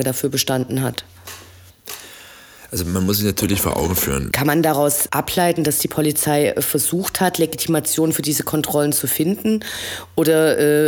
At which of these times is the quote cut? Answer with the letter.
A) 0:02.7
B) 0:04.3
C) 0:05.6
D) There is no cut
B